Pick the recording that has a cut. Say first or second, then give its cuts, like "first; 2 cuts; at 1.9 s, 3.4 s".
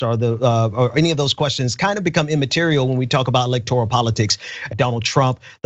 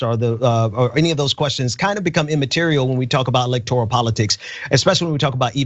first; 1 cut; at 4.7 s